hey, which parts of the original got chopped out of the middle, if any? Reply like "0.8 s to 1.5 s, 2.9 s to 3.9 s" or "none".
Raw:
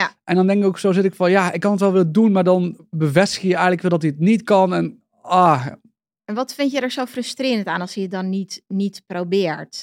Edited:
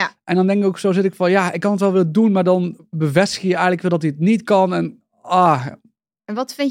none